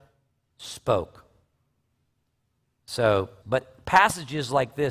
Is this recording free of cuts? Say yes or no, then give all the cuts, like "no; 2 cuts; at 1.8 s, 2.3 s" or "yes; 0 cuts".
no; 1 cut; at 3.4 s